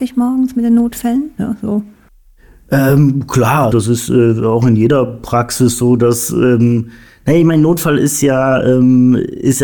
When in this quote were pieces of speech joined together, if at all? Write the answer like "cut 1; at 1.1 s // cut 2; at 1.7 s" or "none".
cut 1; at 1.4 s // cut 2; at 3.7 s